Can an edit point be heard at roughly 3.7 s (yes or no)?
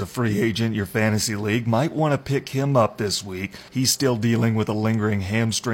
yes